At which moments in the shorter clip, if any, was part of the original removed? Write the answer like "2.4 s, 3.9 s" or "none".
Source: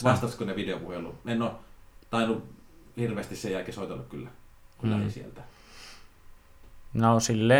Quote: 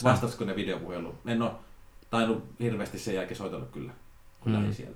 2.6 s